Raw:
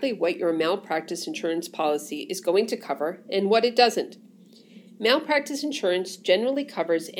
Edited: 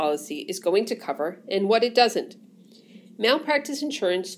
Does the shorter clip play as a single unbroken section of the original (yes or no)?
yes